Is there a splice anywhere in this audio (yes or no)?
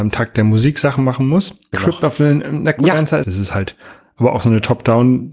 yes